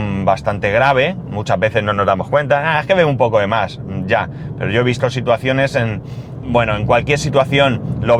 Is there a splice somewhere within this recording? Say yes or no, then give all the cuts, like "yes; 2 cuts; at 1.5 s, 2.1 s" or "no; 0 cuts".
yes; 1 cut; at 6.4 s